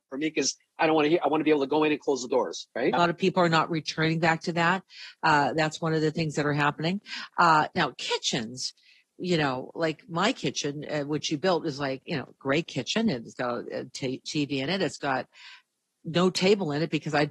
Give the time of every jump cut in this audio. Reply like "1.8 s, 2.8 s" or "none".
2.9 s, 7.3 s